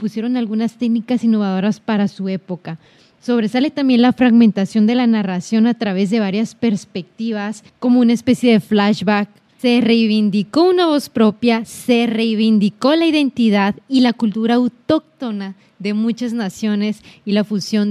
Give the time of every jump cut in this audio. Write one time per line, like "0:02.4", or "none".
0:07.7
0:09.6